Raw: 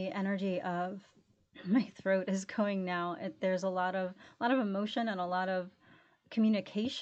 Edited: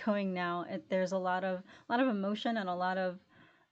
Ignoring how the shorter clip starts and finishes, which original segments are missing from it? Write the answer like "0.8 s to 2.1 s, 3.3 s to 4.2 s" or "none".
none